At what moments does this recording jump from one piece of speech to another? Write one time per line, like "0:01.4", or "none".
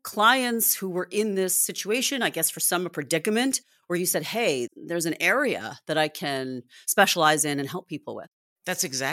none

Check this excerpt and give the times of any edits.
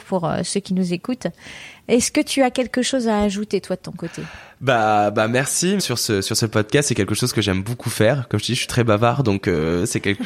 0:05.8

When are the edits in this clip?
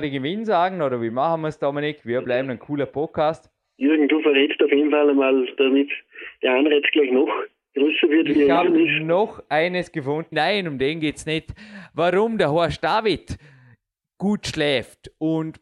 0:05.6
0:10.3

